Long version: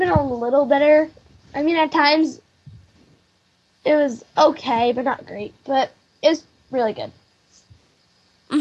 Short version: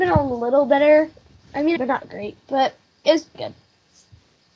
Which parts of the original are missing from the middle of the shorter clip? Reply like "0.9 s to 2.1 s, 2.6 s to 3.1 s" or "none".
1.8 s to 4.9 s, 6.5 s to 6.9 s